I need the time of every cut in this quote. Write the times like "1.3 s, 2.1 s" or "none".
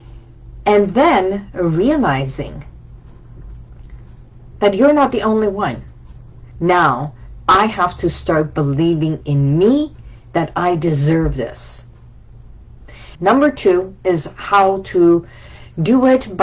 6.5 s, 13.1 s